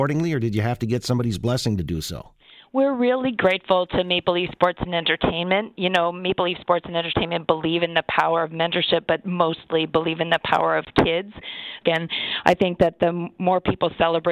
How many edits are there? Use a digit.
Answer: 1